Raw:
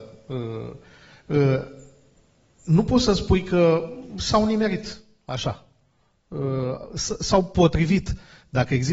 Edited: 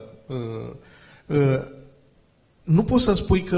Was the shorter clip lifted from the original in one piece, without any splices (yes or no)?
yes